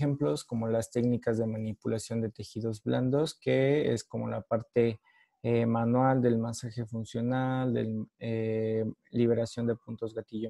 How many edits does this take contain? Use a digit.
0